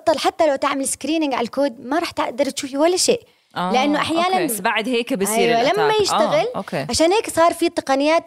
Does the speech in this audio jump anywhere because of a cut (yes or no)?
yes